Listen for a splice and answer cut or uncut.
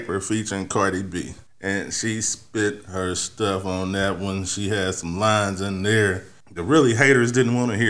uncut